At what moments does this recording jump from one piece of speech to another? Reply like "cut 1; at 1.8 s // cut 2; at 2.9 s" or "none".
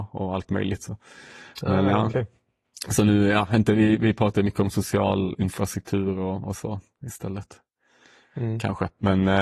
none